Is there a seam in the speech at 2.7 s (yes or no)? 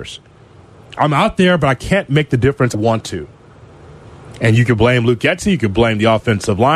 yes